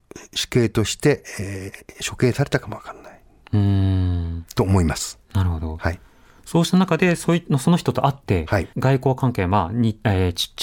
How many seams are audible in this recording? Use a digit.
1